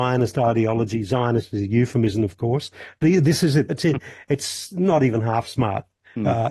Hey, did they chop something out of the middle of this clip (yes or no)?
yes